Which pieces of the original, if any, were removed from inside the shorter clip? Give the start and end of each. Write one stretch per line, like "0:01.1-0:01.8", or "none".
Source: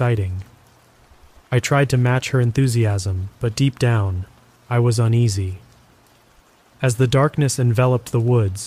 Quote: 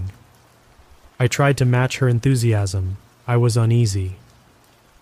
0:03.4-0:04.5